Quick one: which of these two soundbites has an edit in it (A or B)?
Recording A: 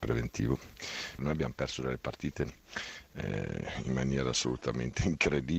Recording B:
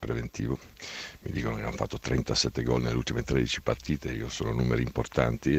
A